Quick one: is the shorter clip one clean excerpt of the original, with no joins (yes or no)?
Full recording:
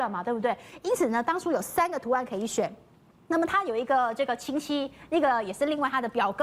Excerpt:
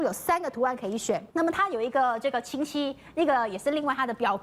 no